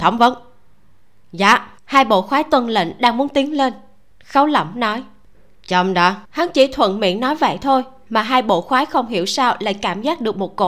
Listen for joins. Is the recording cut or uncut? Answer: cut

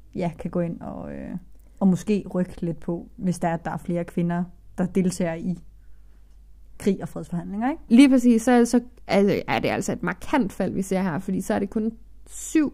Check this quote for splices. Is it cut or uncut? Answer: cut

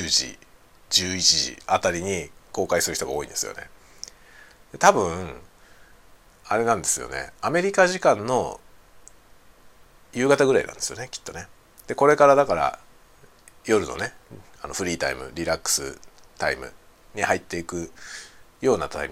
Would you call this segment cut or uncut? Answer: uncut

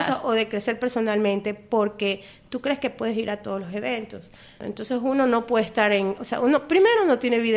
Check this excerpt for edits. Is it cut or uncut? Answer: uncut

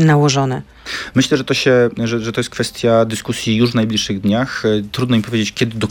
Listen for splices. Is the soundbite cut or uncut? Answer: uncut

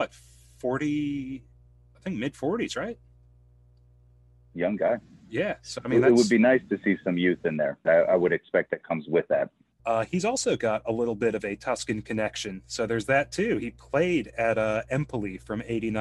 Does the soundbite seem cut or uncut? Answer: cut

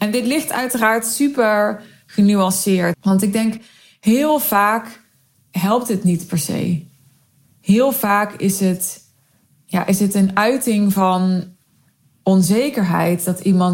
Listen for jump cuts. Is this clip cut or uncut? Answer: cut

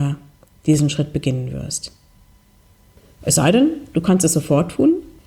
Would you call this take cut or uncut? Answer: uncut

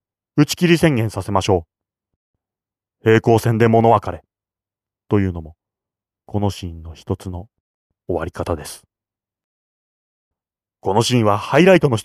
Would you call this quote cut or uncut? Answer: uncut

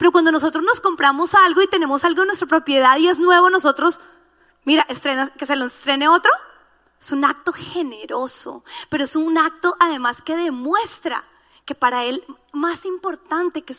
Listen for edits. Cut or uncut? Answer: uncut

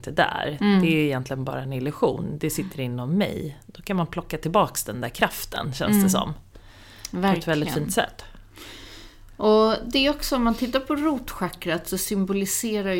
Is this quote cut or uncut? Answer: uncut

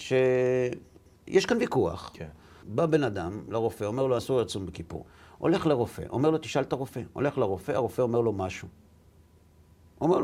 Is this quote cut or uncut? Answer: cut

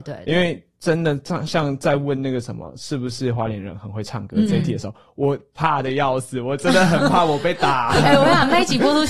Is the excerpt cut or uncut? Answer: uncut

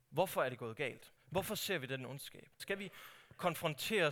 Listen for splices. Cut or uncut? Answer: cut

